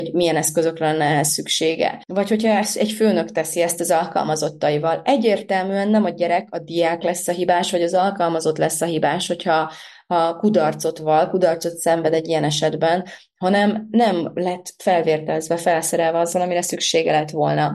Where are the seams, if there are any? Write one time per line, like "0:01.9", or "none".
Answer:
0:02.0